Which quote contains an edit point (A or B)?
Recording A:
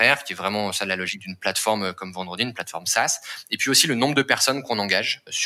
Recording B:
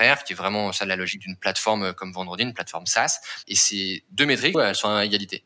B